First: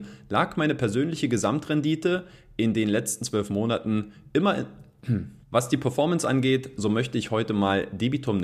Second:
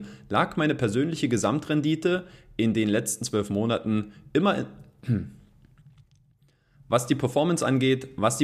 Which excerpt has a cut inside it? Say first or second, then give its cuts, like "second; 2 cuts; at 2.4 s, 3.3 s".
first; 2 cuts; at 5.4 s, 6.8 s